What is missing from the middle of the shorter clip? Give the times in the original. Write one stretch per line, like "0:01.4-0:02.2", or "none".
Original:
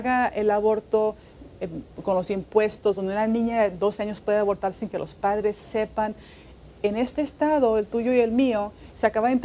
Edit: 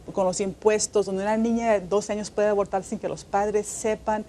none